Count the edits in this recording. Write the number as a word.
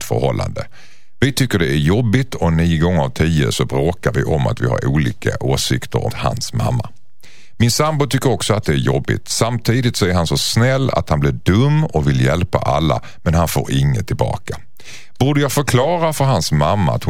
one